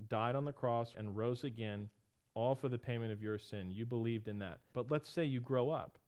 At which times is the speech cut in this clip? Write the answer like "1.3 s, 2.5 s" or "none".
0.9 s, 4.7 s